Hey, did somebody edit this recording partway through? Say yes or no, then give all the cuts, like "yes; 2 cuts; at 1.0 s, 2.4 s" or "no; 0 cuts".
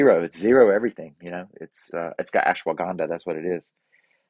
yes; 1 cut; at 1.9 s